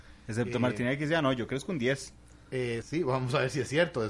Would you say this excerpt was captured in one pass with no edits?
no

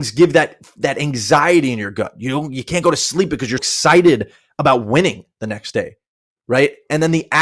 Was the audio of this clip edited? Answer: yes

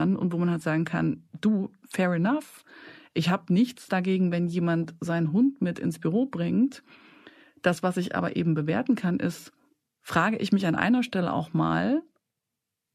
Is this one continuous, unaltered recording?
yes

